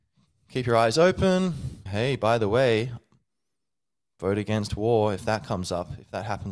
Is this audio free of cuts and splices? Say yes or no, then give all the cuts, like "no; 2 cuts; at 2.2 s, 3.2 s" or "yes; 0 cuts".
no; 1 cut; at 1.9 s